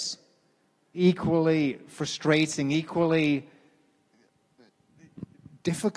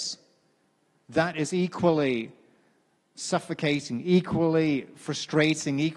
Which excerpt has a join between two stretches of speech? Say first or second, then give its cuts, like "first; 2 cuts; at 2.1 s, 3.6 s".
first; 1 cut; at 0.9 s